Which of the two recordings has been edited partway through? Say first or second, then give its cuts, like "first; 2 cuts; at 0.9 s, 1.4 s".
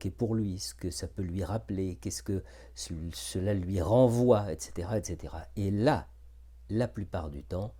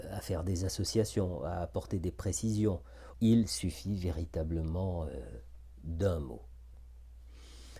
second; 1 cut; at 3.1 s